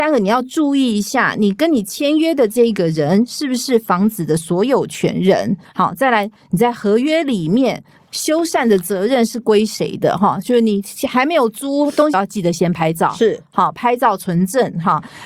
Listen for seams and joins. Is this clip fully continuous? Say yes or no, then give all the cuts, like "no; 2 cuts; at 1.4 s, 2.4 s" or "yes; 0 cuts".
no; 1 cut; at 12.1 s